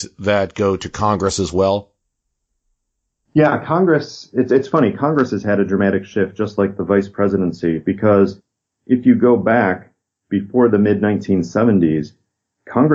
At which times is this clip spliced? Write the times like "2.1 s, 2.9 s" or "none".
none